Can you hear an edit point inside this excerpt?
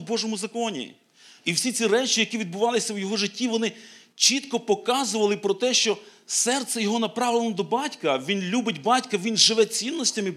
yes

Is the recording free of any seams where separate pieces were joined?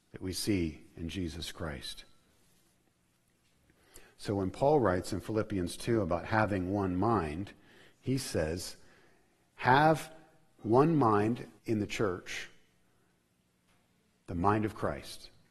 no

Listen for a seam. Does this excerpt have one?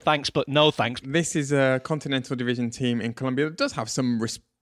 yes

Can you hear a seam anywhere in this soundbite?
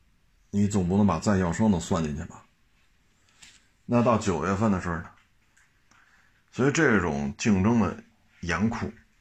yes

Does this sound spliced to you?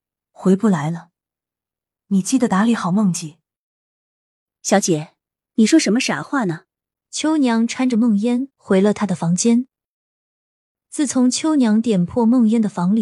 yes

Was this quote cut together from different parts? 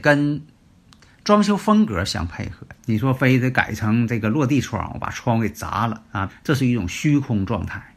yes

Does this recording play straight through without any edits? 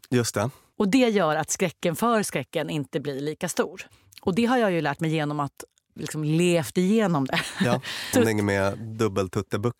no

